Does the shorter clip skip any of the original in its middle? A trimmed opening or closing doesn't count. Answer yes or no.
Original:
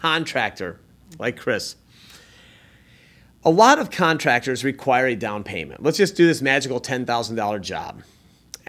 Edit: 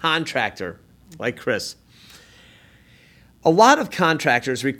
no